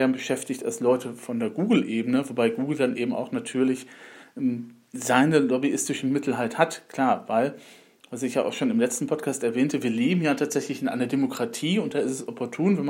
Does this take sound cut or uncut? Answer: uncut